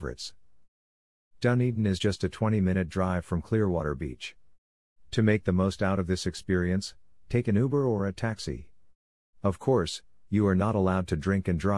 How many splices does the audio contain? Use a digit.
0